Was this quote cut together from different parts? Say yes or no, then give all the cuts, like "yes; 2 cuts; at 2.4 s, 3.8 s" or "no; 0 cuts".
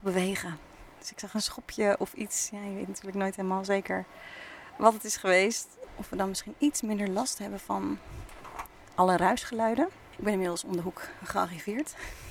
yes; 1 cut; at 5.9 s